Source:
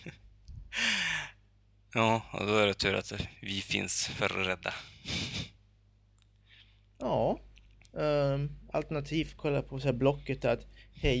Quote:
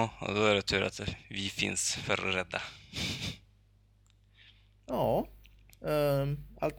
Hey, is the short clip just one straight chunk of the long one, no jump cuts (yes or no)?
yes